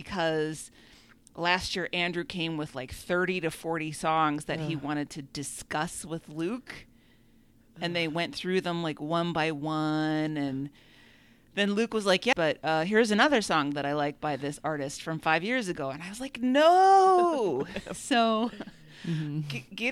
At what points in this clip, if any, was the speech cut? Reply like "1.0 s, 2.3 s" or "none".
12.3 s